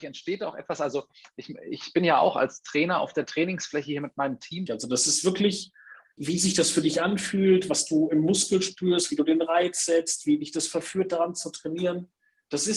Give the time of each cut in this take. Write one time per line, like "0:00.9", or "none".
0:04.7
0:06.2